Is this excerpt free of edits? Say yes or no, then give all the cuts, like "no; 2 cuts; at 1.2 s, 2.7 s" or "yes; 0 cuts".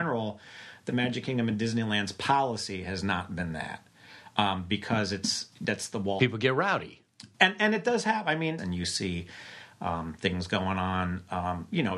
no; 1 cut; at 8.6 s